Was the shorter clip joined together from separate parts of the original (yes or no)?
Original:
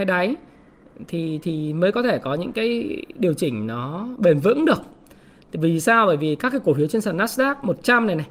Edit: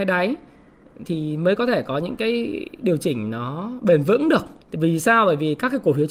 yes